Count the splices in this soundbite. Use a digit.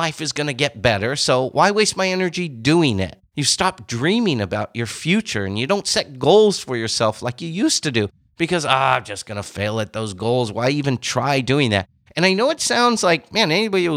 0